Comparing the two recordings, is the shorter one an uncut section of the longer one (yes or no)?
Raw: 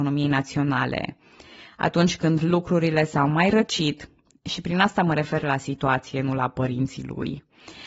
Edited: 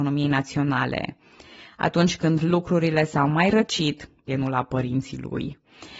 no